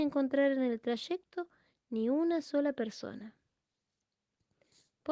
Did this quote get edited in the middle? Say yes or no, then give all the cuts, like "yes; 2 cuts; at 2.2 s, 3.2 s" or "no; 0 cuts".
no; 0 cuts